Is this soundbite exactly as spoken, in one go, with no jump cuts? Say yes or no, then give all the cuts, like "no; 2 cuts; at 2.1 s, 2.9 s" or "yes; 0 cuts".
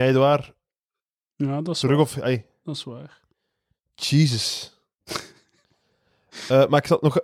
yes; 0 cuts